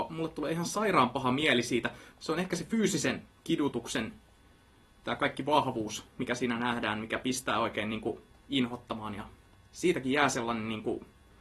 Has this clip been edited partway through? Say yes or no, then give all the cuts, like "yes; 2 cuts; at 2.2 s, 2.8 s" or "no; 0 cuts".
no; 0 cuts